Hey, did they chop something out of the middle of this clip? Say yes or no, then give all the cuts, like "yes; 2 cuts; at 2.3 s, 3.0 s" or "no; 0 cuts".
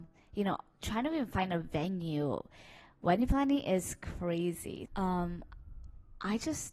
yes; 1 cut; at 4.9 s